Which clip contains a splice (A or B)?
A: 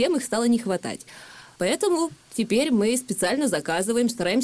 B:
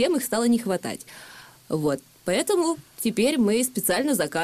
A